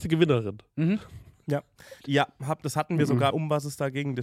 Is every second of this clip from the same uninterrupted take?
no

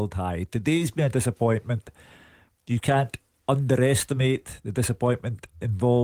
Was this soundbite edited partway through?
no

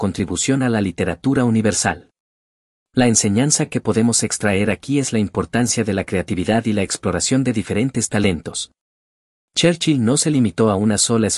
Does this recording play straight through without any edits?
yes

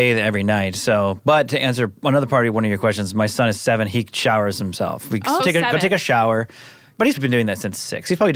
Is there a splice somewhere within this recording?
yes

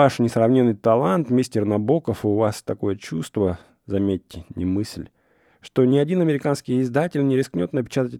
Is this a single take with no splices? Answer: yes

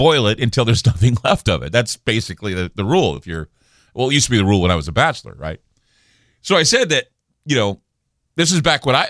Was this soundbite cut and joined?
no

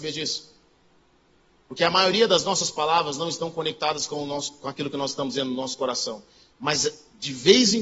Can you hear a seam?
no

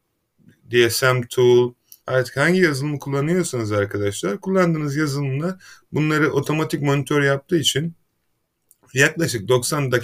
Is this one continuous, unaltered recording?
no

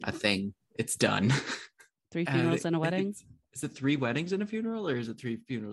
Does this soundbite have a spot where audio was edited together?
yes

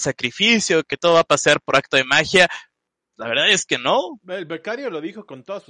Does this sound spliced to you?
no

